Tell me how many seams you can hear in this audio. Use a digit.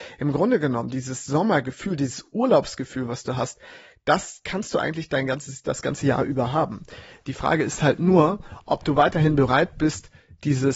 0